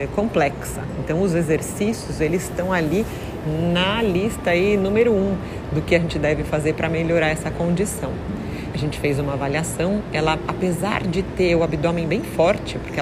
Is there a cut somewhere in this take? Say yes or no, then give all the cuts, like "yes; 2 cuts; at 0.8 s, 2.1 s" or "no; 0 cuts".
yes; 1 cut; at 8.7 s